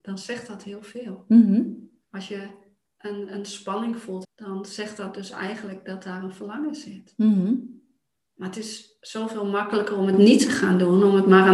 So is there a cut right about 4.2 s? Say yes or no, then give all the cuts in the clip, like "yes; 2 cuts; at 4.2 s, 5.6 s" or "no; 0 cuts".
yes; 1 cut; at 4.2 s